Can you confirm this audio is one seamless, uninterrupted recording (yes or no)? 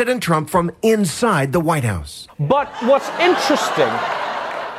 no